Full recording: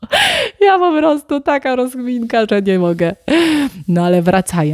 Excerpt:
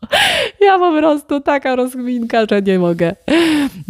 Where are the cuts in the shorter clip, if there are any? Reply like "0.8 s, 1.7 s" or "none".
none

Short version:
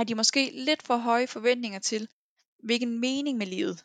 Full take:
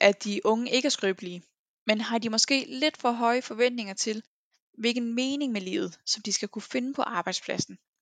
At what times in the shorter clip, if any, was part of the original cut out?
none

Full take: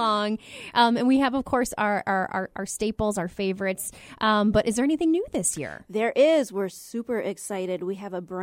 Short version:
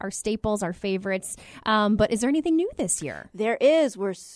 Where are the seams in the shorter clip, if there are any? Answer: none

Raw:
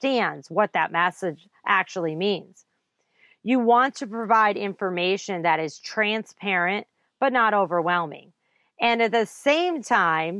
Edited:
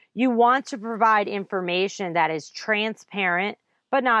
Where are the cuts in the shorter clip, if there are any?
none

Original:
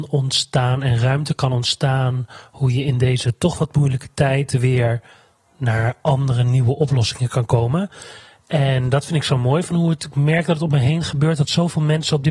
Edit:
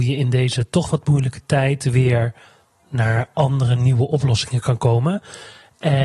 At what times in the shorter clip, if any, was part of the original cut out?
none

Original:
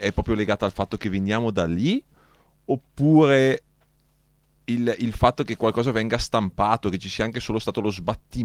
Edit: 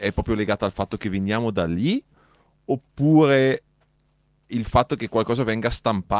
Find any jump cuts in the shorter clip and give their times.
4.5 s

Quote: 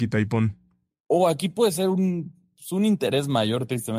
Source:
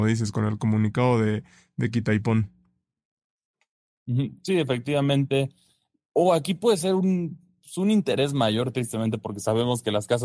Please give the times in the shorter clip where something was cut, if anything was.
0.9 s

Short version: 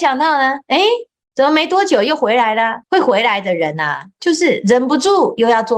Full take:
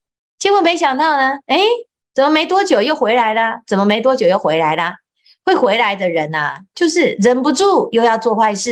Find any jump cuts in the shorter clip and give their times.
2.8 s

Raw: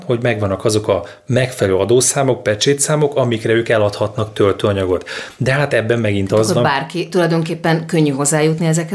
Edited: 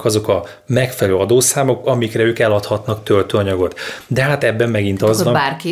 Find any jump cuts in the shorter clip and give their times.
1.8 s

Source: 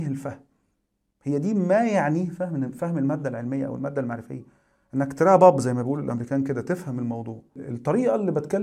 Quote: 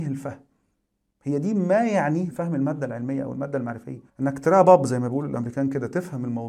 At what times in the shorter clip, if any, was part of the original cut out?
2.3 s, 4.1 s

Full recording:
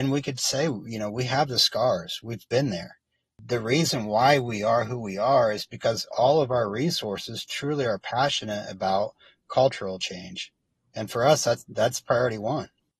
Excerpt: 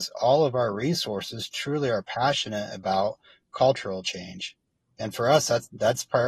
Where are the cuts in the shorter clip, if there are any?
none

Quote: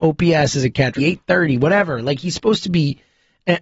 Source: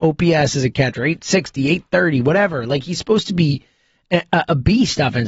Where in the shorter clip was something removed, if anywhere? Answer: 1.0 s

